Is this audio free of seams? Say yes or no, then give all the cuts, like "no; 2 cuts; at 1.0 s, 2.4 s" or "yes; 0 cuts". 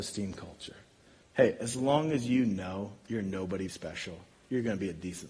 no; 2 cuts; at 1.2 s, 3.7 s